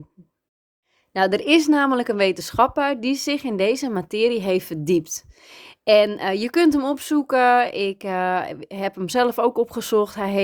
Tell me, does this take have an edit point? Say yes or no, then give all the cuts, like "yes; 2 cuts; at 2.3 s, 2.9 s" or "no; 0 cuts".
no; 0 cuts